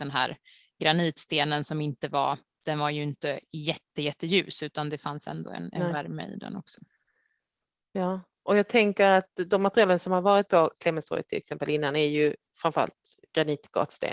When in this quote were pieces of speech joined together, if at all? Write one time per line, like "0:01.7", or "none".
none